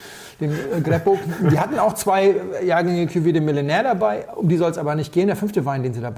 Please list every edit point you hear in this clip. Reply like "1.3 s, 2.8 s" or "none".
4.3 s